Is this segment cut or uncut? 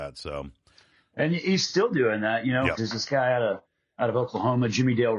cut